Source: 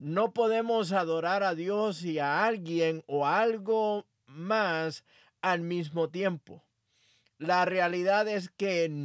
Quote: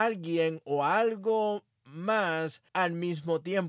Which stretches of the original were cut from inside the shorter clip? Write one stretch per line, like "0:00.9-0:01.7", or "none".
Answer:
0:05.1-0:05.4